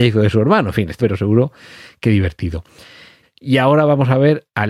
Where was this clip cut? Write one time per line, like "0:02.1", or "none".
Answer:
0:01.0
0:03.2